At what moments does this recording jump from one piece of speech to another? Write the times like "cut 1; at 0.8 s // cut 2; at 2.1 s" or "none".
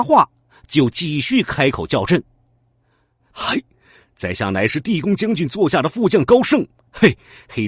cut 1; at 3.2 s